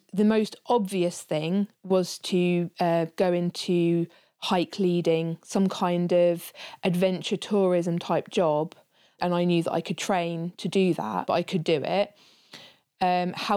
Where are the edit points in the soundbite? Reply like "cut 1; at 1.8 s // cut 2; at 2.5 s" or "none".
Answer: cut 1; at 9.2 s // cut 2; at 11.3 s